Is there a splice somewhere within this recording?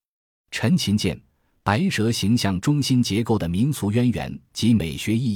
no; 0 cuts

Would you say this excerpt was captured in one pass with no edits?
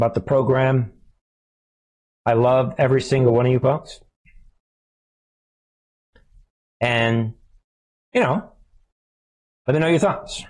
yes; 0 cuts

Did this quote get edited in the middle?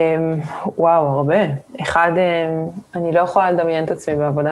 no; 0 cuts

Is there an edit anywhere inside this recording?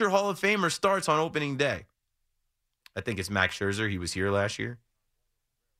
no; 0 cuts

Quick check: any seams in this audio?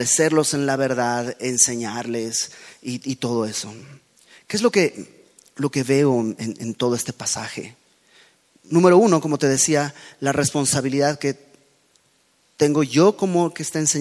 no; 0 cuts

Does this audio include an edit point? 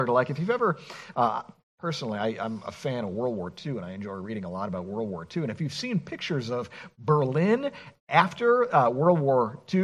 no; 0 cuts

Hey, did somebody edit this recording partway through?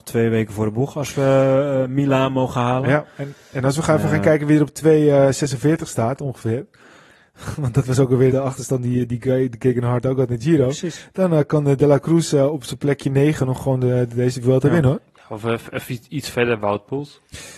yes; 1 cut; at 8.3 s

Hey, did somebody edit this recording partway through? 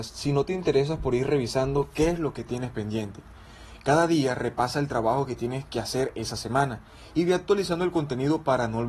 no; 0 cuts

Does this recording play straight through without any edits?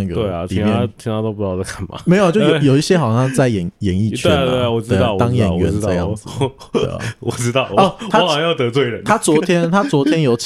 yes; 0 cuts

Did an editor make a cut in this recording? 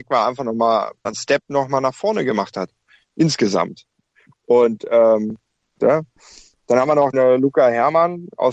yes; 3 cuts; at 1.0 s, 5.8 s, 7.1 s

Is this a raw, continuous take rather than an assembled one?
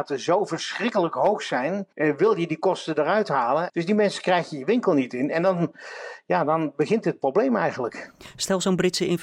no; 2 cuts; at 1.9 s, 3.7 s

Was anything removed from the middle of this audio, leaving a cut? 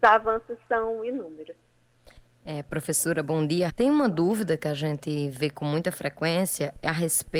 yes; 1 cut; at 3.7 s

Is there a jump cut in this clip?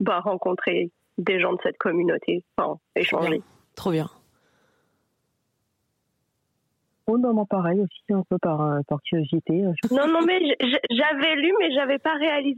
no; 0 cuts

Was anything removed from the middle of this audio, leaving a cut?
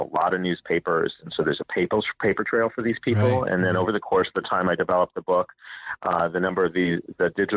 no; 0 cuts

